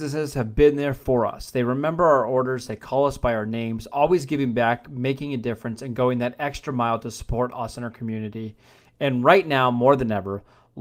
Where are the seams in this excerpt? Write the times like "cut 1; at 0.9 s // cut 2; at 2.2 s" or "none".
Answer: none